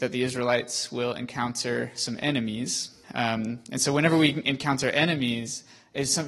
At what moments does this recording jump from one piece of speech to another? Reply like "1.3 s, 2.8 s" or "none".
3.0 s